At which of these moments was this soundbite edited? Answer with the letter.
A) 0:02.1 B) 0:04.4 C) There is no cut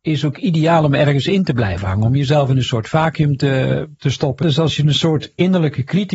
B